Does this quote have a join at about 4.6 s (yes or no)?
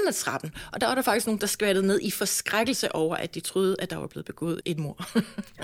yes